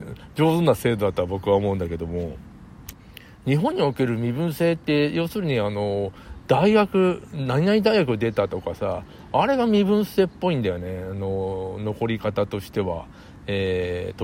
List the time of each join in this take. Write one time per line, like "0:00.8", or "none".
none